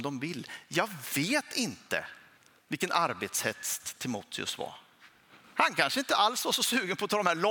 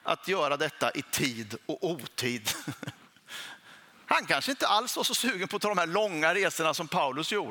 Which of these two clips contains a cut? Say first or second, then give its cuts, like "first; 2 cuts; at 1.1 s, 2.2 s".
first; 1 cut; at 5.4 s